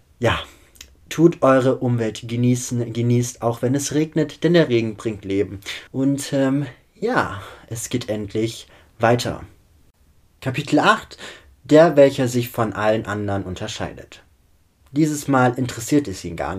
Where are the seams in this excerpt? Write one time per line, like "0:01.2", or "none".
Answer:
0:05.9